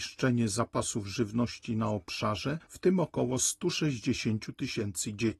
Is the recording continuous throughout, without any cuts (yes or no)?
no